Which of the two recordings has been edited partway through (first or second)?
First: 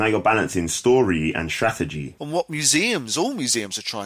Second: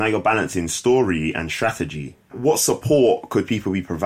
first